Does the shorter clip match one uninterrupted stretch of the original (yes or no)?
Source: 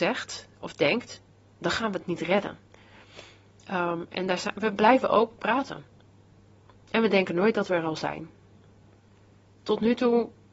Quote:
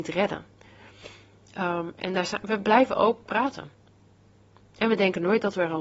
yes